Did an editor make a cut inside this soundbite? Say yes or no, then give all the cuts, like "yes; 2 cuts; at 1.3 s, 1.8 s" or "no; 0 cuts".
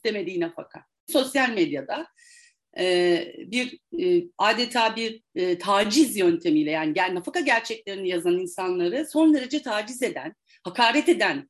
yes; 1 cut; at 1.1 s